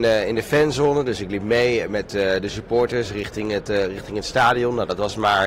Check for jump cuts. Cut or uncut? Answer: uncut